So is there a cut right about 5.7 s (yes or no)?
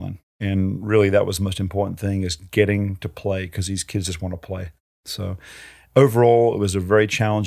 no